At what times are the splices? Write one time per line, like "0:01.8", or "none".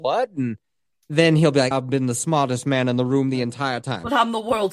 0:01.7